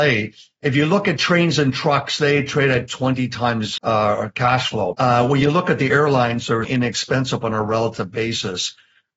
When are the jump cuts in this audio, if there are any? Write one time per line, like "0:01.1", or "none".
0:03.8
0:04.9
0:06.6